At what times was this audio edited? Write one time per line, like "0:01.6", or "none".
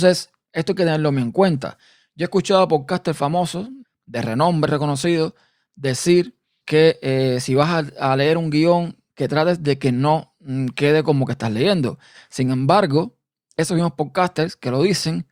0:04.7